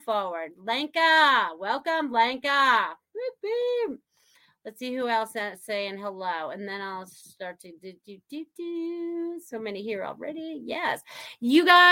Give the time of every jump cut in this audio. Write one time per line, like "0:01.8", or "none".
none